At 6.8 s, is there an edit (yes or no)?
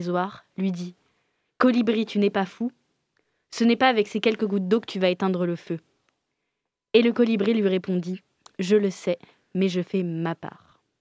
no